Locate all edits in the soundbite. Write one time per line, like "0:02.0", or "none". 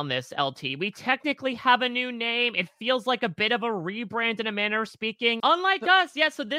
0:05.4